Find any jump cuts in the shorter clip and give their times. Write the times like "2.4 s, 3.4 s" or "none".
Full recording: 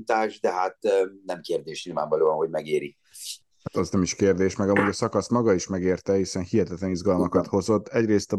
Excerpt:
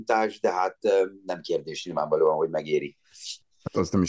none